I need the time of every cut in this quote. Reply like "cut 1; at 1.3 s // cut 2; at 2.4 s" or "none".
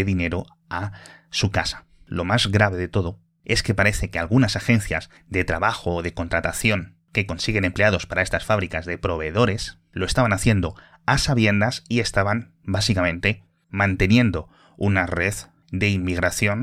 none